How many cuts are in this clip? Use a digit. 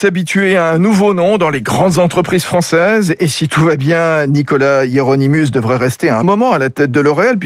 1